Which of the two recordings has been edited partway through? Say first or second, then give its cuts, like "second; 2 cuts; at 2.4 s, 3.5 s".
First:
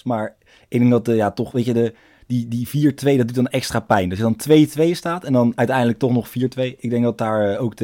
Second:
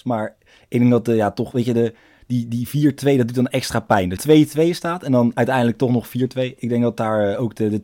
second; 1 cut; at 4.2 s